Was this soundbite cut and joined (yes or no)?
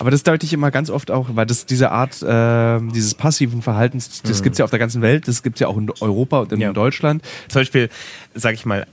yes